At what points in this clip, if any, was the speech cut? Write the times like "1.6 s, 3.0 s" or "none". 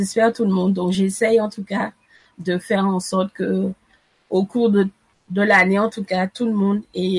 none